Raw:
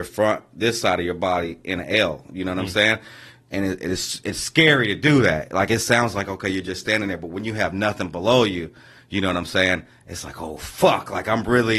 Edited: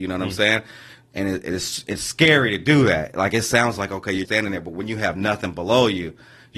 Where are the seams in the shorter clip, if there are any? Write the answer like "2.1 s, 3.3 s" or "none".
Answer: 4.3 s